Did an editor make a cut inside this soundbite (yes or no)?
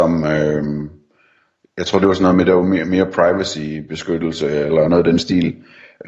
no